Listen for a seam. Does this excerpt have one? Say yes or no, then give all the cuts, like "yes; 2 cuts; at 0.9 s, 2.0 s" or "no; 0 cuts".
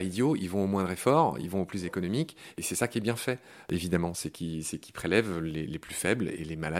no; 0 cuts